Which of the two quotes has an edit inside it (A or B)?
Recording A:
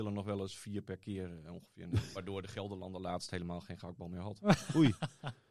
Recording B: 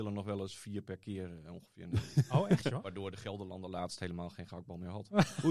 A